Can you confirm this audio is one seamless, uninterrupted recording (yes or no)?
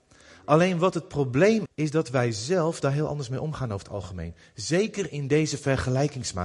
no